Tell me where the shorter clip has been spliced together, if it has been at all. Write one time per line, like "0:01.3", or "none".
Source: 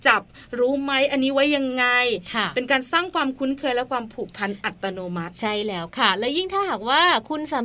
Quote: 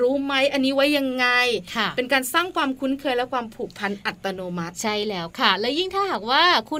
none

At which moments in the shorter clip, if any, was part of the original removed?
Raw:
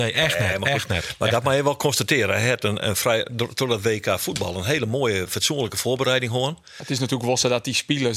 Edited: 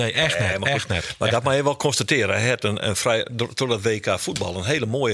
none

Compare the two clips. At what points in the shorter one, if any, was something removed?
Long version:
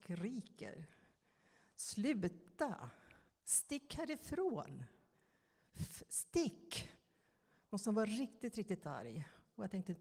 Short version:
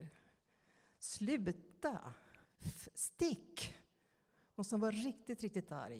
0:02.4

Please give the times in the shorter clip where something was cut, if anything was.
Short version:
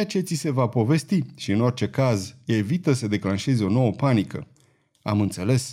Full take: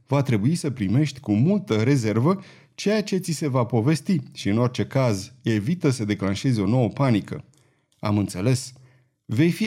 none

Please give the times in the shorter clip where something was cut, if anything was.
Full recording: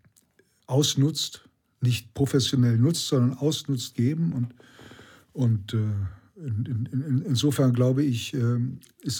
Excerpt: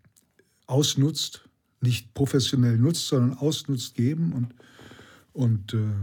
none

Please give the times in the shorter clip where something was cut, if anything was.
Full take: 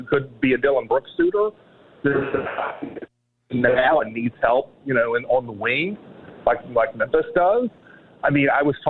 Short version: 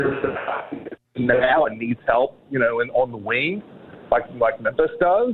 0:01.0

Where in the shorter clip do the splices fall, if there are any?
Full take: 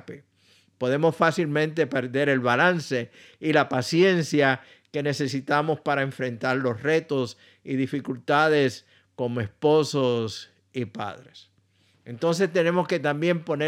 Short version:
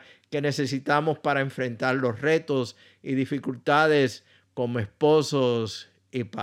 none

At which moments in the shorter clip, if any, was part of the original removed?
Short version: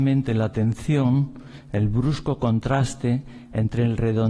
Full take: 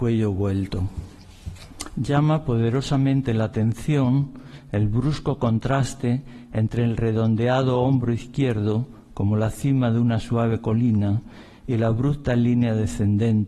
none

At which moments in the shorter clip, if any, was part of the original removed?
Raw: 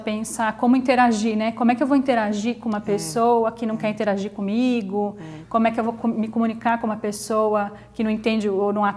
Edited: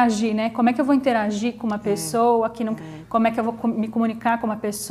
0:02.8

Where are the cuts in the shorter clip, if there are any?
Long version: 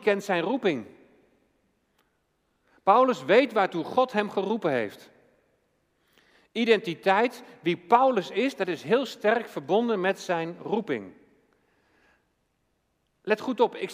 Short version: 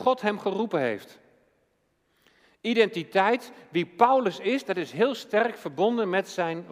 none

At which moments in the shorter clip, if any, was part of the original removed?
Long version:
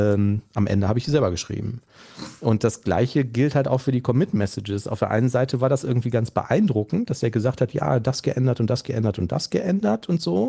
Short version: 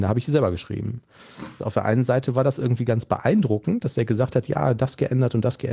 0:01.6

